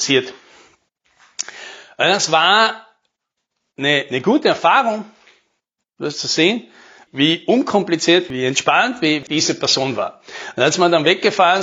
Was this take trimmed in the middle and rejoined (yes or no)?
no